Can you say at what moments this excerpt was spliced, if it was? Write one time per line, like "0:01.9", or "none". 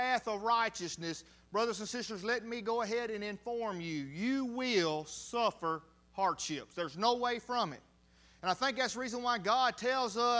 none